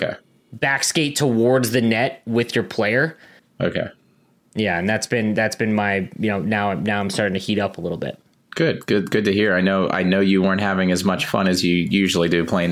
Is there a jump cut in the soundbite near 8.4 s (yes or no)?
no